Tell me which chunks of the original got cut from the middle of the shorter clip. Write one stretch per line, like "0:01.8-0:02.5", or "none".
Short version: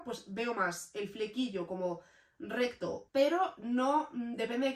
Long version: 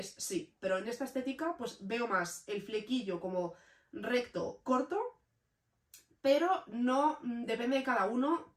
0:04.6-0:06.2

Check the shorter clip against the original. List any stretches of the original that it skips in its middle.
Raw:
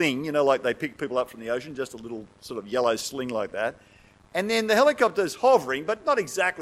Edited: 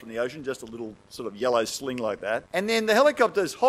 0:03.8-0:04.3

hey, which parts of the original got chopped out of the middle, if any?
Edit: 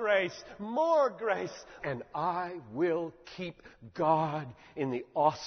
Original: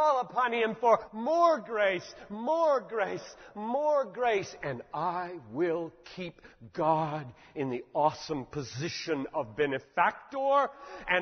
0:03.5-0:04.6

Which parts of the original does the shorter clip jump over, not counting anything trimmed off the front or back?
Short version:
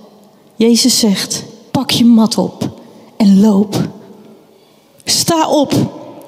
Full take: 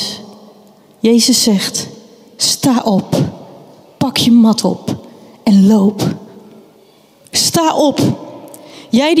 0:02.1-0:03.9

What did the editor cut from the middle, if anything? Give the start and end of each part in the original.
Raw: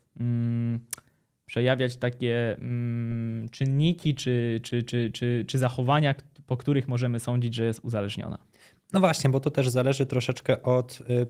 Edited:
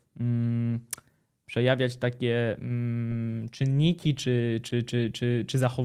none

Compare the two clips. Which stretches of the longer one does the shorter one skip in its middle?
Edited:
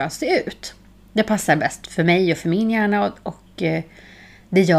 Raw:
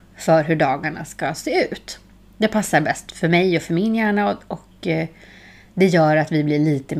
none

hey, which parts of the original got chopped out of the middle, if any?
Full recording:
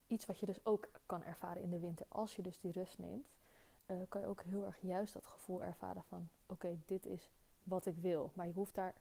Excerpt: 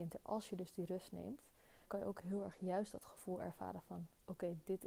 0:03.7-0:04.1

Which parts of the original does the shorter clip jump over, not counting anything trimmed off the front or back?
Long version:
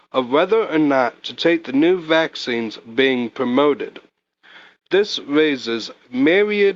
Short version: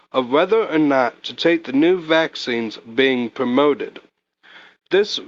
none

